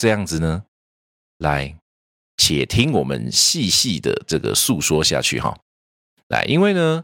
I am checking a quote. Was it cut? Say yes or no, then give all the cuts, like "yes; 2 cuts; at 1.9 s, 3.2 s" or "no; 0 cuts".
no; 0 cuts